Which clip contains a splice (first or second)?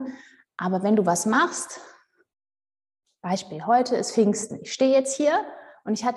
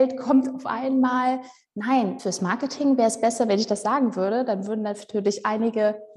second